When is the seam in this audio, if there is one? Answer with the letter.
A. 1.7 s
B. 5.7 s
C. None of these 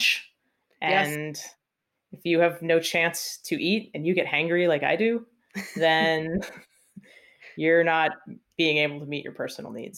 C